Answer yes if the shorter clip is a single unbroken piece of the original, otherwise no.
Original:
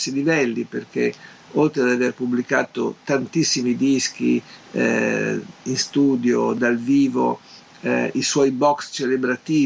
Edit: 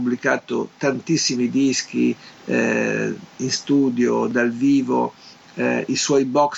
yes